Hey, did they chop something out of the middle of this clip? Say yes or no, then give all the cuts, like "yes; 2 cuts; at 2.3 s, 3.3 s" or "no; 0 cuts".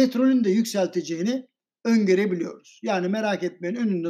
no; 0 cuts